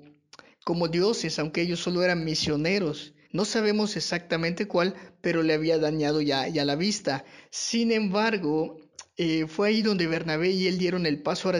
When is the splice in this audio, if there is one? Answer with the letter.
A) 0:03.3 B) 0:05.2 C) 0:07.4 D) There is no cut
A